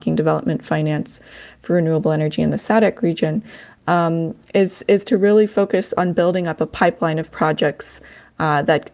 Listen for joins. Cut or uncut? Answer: uncut